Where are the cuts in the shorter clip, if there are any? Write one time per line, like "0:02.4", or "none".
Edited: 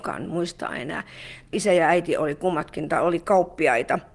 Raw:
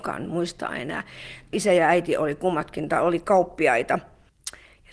none